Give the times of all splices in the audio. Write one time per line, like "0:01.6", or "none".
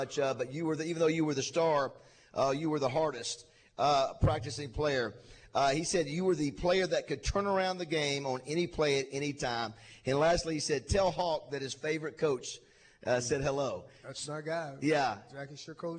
none